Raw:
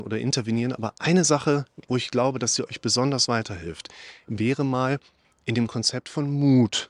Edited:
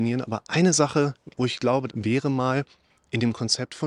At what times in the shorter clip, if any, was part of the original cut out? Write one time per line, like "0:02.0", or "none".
0:01.9